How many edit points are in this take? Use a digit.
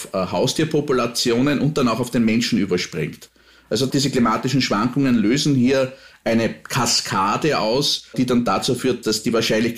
0